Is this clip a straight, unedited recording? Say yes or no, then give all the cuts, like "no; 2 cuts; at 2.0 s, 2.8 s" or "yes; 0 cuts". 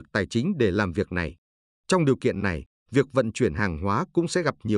no; 1 cut; at 2.8 s